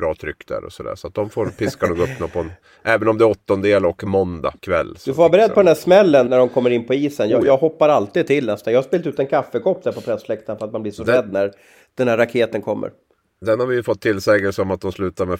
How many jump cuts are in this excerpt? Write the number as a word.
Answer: two